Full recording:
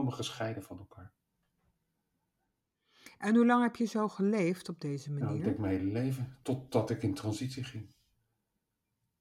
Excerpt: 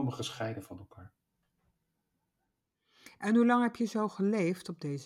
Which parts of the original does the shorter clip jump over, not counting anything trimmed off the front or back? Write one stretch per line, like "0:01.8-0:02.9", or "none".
none